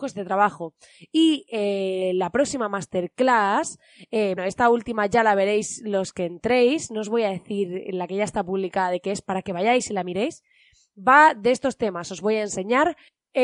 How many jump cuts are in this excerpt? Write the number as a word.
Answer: one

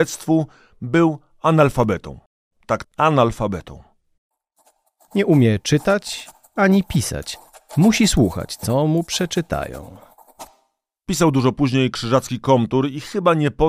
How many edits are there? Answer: one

